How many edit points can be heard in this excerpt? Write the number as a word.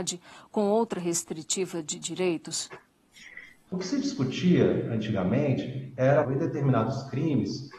two